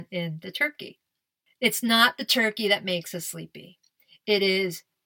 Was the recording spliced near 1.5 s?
yes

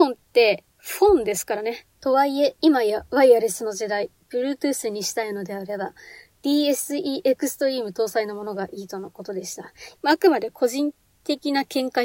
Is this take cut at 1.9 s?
yes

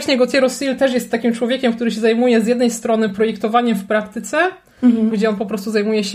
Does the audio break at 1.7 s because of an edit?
no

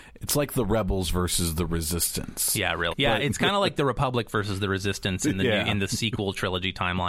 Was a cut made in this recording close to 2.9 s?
yes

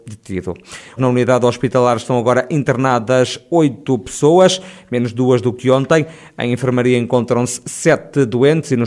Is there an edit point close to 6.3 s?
no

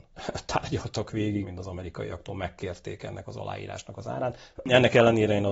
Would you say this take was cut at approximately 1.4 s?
yes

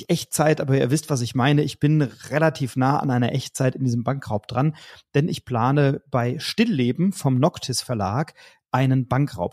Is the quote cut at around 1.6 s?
no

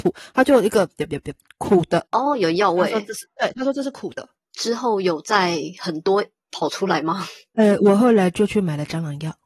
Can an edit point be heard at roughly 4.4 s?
yes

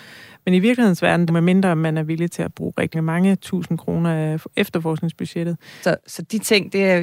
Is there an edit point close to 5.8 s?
yes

